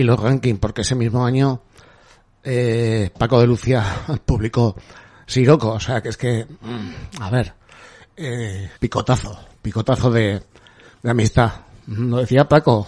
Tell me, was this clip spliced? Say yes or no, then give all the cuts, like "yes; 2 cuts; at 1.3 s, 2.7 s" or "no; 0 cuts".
yes; 1 cut; at 8.8 s